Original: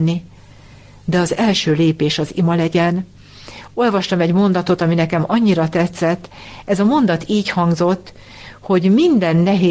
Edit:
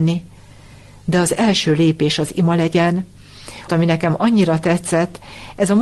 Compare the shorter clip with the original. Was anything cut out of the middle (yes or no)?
yes